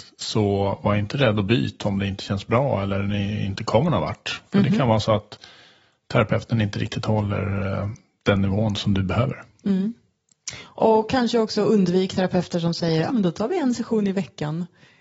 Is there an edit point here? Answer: yes; 1 cut; at 13.1 s

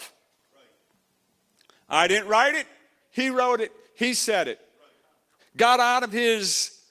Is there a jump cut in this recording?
yes; 2 cuts; at 3.0 s, 5.4 s

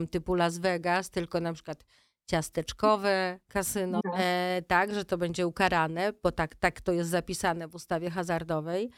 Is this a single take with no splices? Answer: no; 1 cut; at 4.0 s

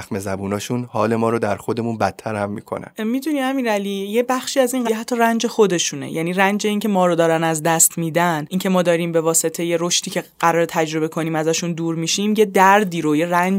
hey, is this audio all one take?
no; 1 cut; at 4.9 s

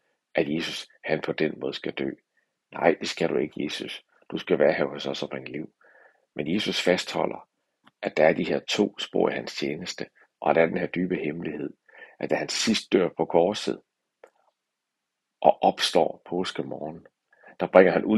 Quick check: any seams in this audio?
no; 0 cuts

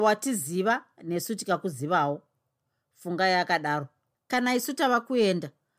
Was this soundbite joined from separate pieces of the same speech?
no; 0 cuts

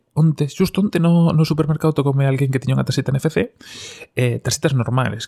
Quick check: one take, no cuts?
yes; 0 cuts

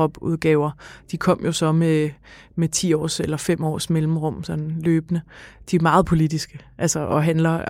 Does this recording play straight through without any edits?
yes; 0 cuts

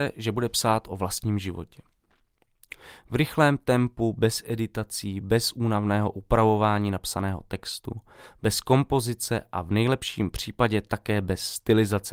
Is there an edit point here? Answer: no; 0 cuts

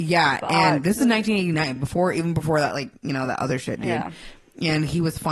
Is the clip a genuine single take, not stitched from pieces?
yes; 0 cuts

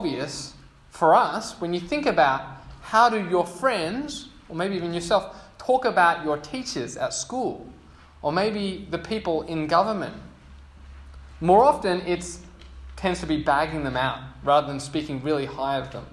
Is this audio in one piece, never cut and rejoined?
yes; 0 cuts

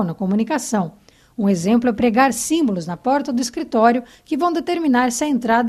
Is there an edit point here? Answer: no; 0 cuts

